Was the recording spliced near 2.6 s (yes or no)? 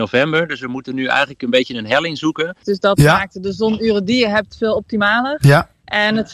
yes